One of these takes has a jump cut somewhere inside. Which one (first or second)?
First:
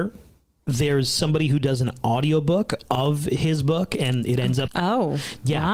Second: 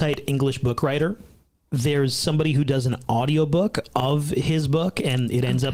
first